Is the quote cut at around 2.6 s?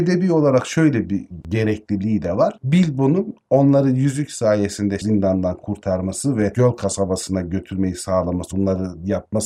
no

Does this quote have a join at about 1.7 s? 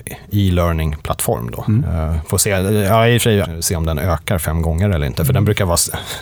yes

